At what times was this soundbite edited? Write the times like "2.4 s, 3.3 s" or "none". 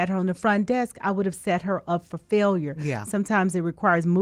3.1 s